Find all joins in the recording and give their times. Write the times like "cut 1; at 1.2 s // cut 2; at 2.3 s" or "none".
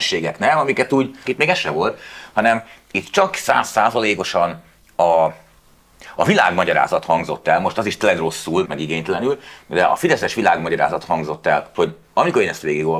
cut 1; at 1.2 s // cut 2; at 8.6 s // cut 3; at 11.7 s